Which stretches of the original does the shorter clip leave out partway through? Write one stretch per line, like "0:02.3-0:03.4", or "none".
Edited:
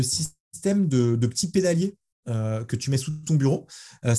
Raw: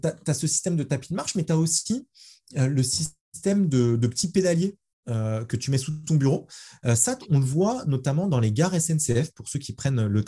none